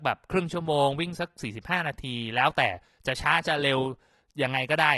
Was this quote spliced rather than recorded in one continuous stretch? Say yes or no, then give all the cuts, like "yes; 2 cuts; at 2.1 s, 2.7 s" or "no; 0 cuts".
no; 0 cuts